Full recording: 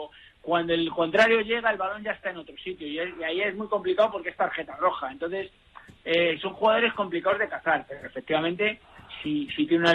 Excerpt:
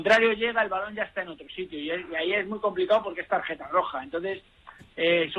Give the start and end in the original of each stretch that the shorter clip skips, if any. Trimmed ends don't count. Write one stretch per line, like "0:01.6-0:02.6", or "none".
none